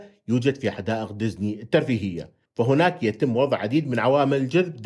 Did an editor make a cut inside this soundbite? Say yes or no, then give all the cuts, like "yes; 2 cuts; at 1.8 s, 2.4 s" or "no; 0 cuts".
no; 0 cuts